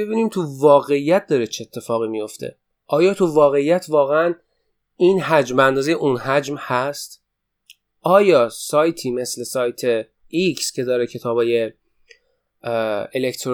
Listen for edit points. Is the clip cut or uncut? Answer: uncut